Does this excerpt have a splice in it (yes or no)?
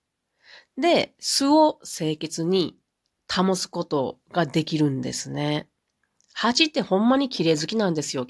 no